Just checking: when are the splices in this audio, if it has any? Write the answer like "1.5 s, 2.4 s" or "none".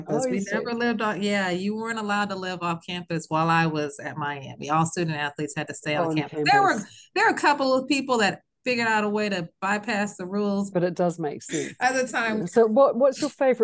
10.7 s, 12.4 s